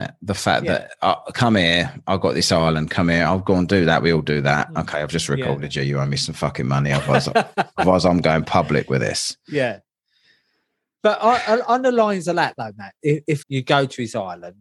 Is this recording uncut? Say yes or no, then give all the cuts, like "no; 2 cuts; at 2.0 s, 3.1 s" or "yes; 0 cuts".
no; 1 cut; at 13.4 s